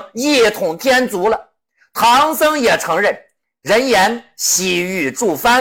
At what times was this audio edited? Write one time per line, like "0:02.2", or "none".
none